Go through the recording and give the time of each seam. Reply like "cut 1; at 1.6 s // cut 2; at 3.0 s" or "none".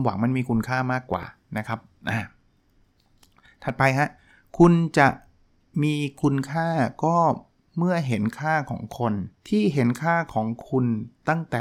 cut 1; at 9.4 s